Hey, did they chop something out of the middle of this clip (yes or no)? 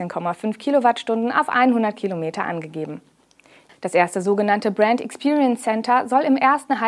yes